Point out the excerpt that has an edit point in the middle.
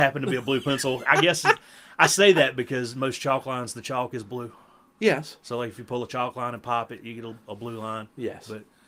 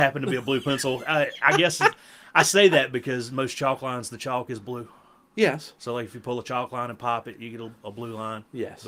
first; 1 cut; at 1.0 s

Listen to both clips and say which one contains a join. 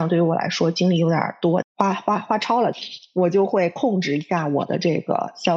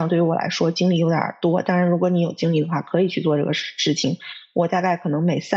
first; 1 cut; at 1.6 s

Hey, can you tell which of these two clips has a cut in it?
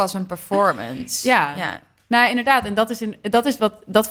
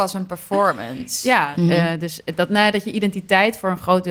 second; 1 cut; at 1.5 s

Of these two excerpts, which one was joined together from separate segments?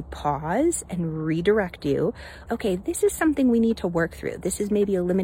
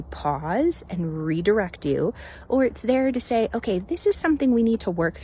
first; 1 cut; at 2.5 s

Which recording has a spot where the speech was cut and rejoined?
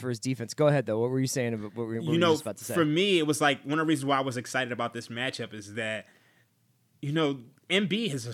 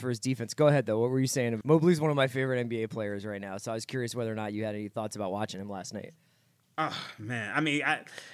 second; 1 cut; at 1.6 s

